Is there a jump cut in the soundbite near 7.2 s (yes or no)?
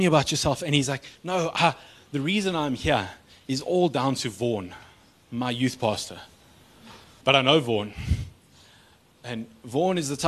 yes